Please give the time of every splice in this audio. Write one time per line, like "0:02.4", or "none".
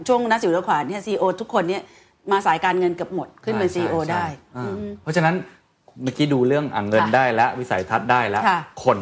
none